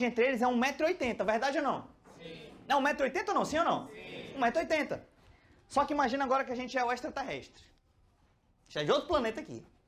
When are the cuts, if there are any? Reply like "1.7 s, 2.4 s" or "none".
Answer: none